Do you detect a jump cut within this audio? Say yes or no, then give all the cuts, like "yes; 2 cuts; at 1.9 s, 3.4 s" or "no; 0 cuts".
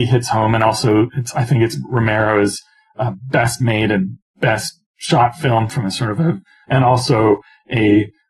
yes; 1 cut; at 6.6 s